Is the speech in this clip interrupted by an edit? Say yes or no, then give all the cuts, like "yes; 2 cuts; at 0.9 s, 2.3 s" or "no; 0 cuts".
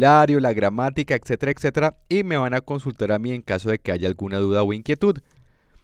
yes; 1 cut; at 1.5 s